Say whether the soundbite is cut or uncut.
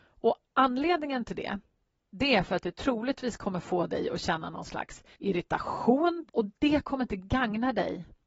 cut